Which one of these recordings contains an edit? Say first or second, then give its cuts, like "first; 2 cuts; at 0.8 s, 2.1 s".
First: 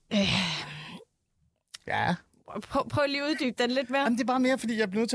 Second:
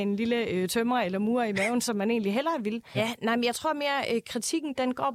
second; 1 cut; at 2.9 s